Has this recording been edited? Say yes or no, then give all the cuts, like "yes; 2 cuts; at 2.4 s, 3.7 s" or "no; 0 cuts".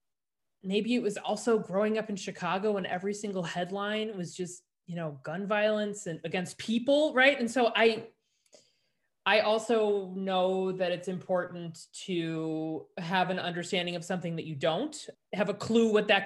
yes; 1 cut; at 15.1 s